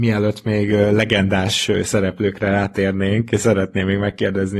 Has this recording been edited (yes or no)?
no